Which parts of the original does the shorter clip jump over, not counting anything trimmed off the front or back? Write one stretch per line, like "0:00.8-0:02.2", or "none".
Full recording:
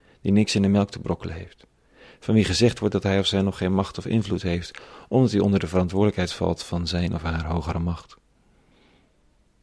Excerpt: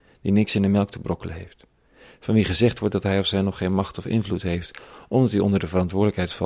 none